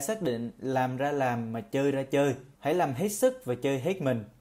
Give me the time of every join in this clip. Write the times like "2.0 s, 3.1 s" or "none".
2.5 s